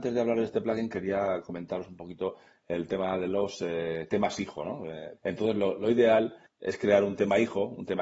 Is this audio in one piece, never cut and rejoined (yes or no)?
no